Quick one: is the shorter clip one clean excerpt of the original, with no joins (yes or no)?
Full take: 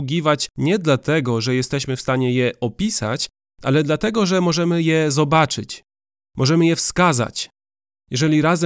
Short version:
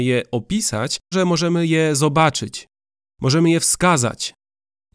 no